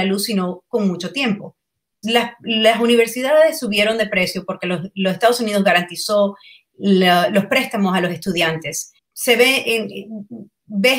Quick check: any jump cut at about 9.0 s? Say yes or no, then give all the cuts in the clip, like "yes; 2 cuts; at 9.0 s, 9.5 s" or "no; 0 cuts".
yes; 2 cuts; at 2.0 s, 9.0 s